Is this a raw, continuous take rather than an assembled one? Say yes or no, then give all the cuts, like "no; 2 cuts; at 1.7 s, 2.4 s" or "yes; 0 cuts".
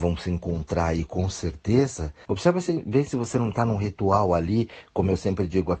no; 1 cut; at 2.3 s